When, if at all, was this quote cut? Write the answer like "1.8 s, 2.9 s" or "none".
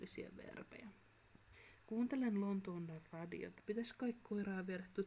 3.6 s